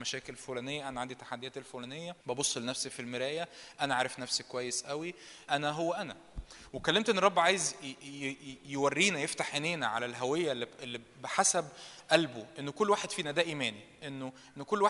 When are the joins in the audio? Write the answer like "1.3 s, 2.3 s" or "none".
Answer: 2.2 s, 5.5 s